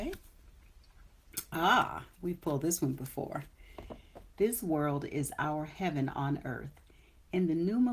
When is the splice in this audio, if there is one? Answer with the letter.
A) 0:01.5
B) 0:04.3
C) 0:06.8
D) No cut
B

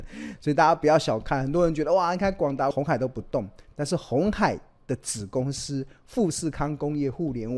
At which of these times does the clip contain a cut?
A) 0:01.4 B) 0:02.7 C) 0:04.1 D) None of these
B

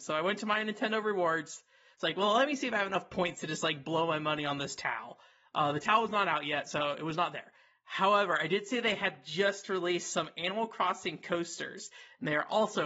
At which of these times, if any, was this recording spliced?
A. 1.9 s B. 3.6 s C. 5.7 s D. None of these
A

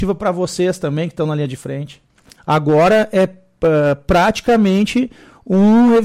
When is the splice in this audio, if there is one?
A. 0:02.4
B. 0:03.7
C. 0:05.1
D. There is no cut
A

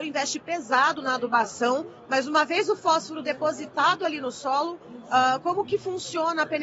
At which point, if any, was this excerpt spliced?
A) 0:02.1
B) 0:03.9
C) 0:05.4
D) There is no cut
D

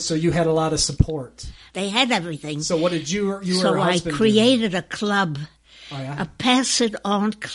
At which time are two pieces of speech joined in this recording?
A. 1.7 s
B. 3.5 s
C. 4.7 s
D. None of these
A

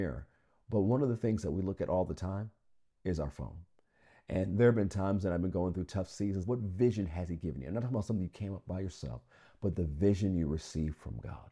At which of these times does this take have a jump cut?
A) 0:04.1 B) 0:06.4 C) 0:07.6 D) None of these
B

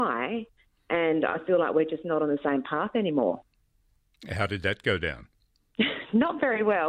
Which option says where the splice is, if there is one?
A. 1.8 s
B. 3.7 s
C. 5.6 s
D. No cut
D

